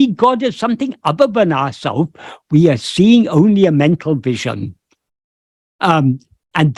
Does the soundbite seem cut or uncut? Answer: uncut